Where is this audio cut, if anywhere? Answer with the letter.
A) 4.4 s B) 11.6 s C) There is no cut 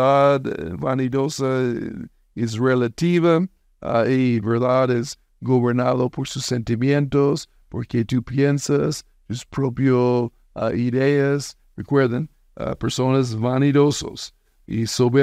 B